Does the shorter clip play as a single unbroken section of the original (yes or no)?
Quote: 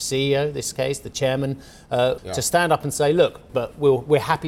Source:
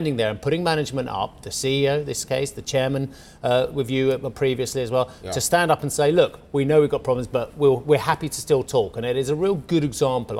no